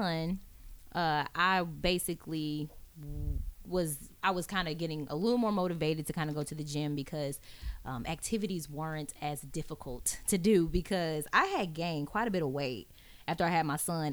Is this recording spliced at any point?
no; 0 cuts

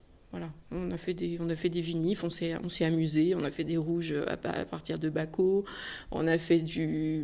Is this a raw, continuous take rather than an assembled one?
yes; 0 cuts

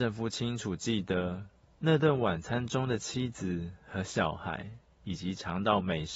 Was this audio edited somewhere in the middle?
yes; 1 cut; at 4.9 s

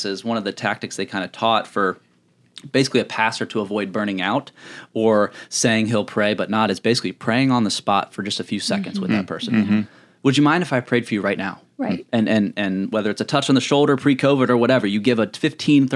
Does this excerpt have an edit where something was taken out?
no; 0 cuts

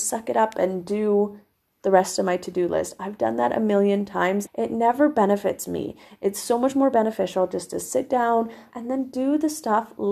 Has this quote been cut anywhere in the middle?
yes; 2 cuts; at 4.5 s, 8.7 s

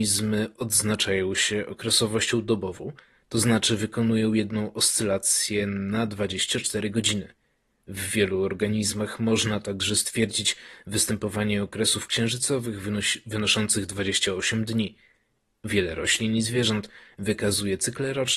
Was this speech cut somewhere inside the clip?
no; 0 cuts

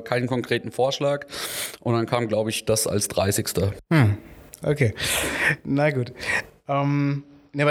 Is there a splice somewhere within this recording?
yes; 1 cut; at 4.6 s

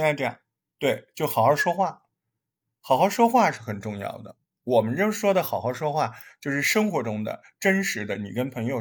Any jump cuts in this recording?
no; 0 cuts

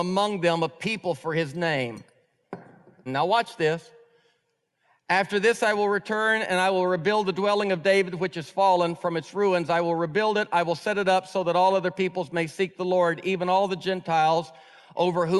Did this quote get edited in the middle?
yes; 1 cut; at 3.1 s

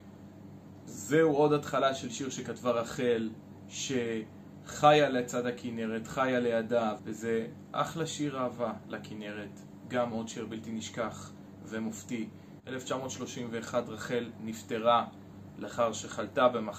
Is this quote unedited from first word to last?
no; 2 cuts; at 7.0 s, 12.6 s

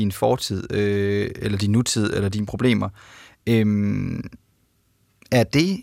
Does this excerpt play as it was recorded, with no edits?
yes; 0 cuts

